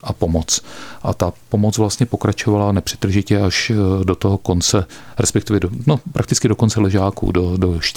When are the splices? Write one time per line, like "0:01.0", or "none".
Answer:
none